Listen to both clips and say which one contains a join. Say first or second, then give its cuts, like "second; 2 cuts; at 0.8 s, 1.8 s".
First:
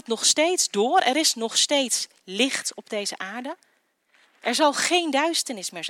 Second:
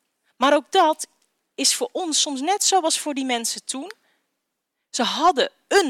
first; 1 cut; at 4.2 s